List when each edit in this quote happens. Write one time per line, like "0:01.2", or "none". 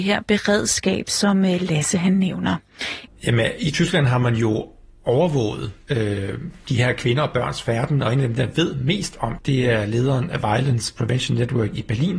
0:03.1
0:09.4